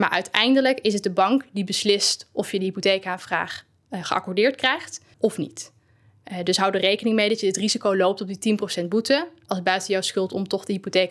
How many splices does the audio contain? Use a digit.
1